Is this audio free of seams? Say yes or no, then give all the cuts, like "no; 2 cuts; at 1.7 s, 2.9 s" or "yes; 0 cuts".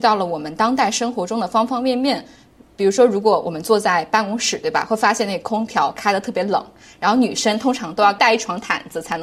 yes; 0 cuts